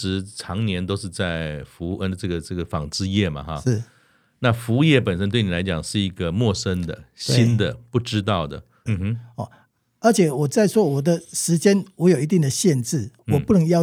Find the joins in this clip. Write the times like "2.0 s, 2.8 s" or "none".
8.9 s